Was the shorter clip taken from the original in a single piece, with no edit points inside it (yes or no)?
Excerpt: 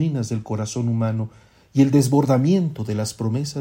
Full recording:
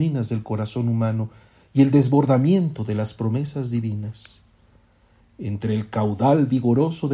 yes